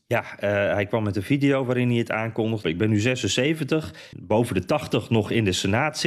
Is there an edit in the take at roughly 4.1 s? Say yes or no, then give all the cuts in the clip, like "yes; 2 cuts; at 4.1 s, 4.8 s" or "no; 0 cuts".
yes; 2 cuts; at 2.6 s, 4.1 s